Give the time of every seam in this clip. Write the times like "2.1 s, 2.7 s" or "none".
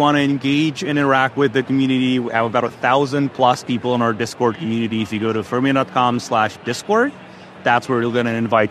none